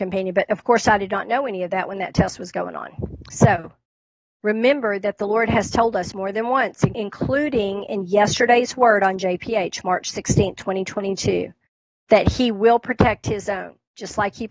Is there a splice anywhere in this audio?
no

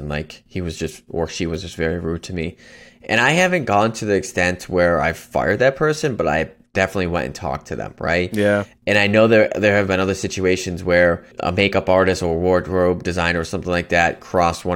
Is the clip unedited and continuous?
no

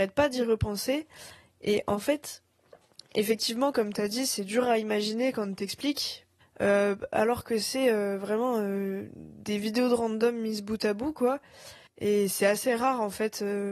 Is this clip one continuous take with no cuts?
no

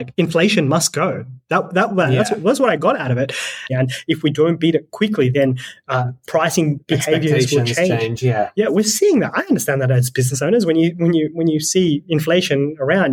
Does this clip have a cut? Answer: yes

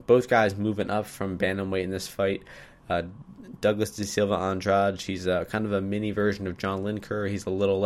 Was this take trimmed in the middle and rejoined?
no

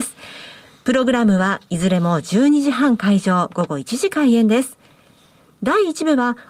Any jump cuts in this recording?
no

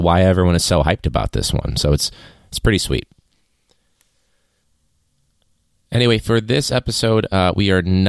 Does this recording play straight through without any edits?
yes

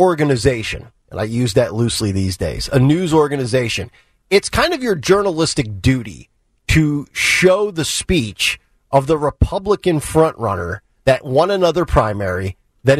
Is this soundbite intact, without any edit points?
yes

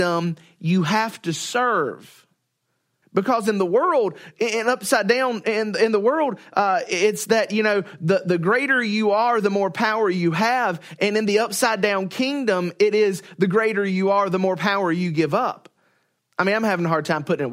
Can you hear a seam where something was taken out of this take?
yes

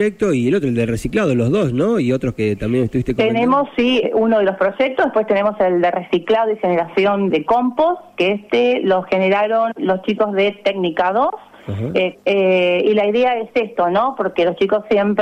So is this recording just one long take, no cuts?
no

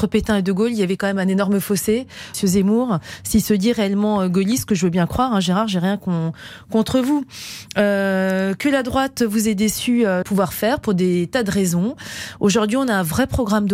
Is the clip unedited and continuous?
no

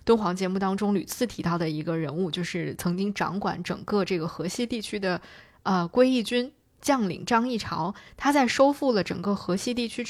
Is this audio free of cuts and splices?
yes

